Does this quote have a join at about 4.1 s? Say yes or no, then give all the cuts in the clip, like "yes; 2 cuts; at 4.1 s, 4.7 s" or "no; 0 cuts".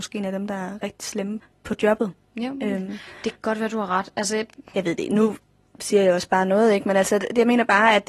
no; 0 cuts